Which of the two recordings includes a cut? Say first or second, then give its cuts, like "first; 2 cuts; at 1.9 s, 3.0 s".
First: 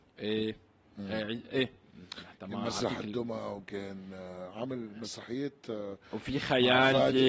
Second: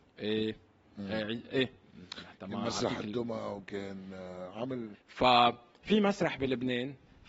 second; 1 cut; at 4.9 s